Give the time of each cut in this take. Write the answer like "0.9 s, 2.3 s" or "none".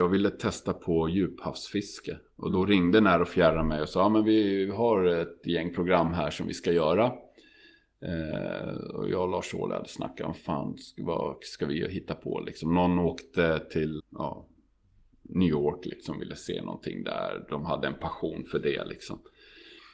14.0 s